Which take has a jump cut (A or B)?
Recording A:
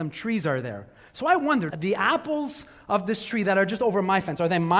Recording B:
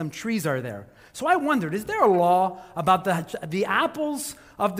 A